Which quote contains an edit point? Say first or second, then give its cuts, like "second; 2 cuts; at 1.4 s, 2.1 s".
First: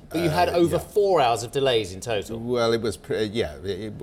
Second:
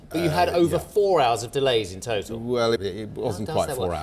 second; 1 cut; at 2.8 s